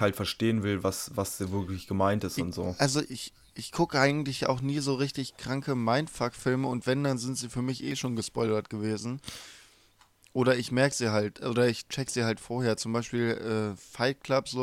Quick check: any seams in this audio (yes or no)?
no